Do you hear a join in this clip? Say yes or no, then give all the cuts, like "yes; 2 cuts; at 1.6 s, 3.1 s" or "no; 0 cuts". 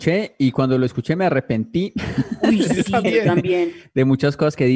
no; 0 cuts